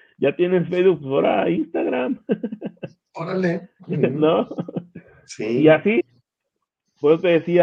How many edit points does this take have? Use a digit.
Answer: 0